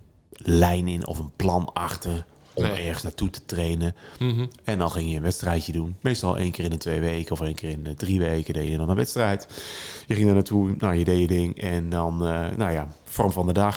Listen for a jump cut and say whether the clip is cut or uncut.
cut